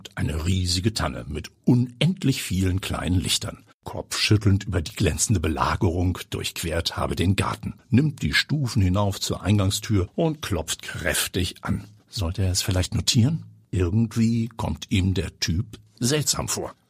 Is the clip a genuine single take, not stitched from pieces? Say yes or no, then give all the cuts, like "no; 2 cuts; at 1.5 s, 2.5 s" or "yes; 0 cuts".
no; 2 cuts; at 3.7 s, 12.0 s